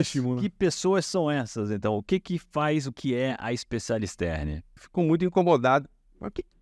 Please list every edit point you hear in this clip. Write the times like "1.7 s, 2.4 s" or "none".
2.9 s, 4.8 s